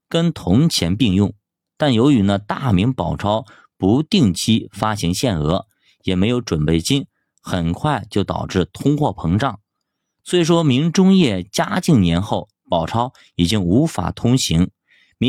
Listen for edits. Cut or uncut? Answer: uncut